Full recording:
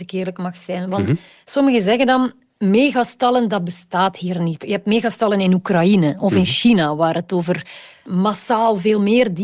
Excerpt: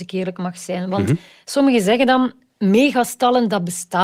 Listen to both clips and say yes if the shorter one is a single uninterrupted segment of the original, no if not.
yes